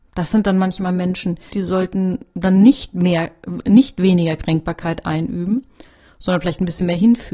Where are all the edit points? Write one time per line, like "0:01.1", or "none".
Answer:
0:01.5